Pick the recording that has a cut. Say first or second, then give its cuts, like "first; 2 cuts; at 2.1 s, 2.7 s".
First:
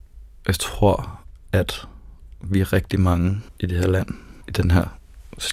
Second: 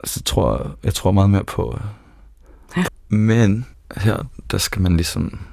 second; 1 cut; at 2.9 s